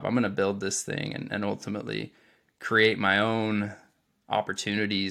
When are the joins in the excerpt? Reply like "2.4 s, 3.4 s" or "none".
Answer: none